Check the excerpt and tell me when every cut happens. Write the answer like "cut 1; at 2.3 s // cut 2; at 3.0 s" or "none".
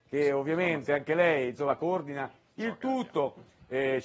none